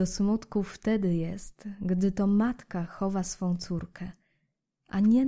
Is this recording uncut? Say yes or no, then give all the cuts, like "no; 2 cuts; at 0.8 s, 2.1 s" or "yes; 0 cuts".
yes; 0 cuts